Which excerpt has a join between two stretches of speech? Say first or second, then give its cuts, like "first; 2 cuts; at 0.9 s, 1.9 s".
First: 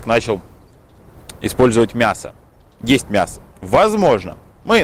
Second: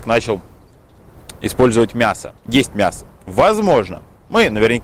second; 1 cut; at 2.4 s